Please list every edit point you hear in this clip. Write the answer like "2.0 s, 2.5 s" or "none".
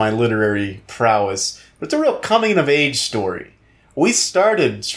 none